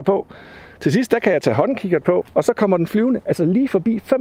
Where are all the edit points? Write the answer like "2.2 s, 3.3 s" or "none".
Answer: 2.2 s